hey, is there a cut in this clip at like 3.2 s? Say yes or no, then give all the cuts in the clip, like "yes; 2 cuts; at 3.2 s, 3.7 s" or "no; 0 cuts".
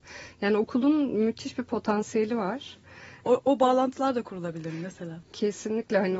yes; 1 cut; at 3.2 s